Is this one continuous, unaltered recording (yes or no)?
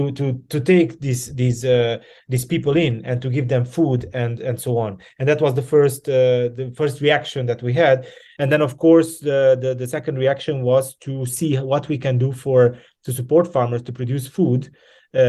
yes